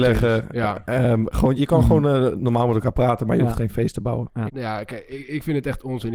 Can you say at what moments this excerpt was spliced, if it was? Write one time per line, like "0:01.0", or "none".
0:01.6
0:04.5